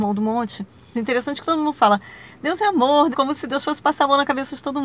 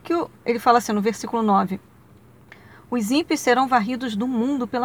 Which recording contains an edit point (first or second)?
first